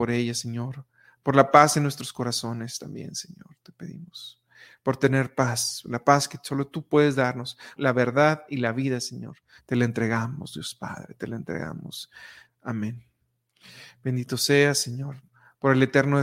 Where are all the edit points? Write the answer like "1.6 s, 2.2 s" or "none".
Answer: 7.8 s, 9.6 s, 12.4 s